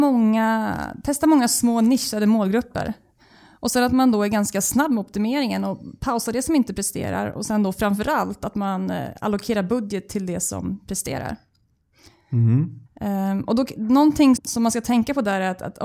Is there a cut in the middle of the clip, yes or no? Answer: yes